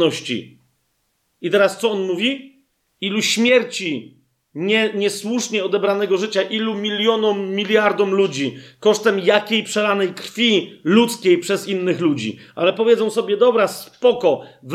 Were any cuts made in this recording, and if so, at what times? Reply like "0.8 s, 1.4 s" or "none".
2.9 s

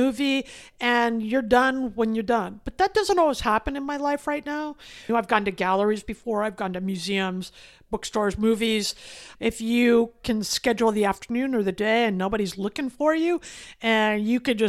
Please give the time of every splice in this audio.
5.1 s, 9.3 s

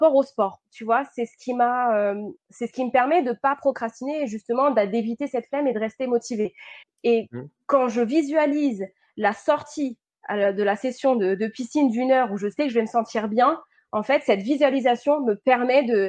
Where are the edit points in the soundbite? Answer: 6.8 s

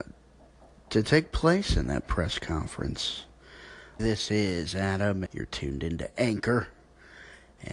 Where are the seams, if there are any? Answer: 4.0 s, 5.3 s

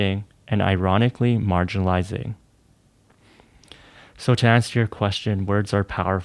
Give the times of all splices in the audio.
none

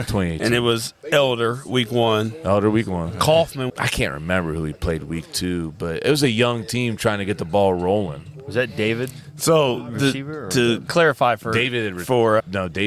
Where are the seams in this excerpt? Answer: 3.7 s

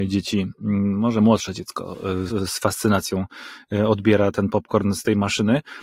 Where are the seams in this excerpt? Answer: 2.3 s

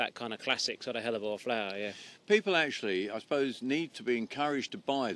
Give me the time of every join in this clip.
none

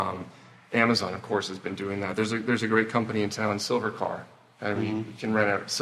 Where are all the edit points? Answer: none

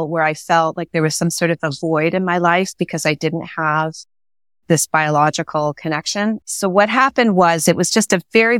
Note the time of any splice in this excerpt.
6.4 s

